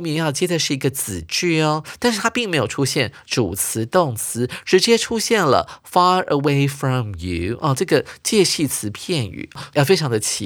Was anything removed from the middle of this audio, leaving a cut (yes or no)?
no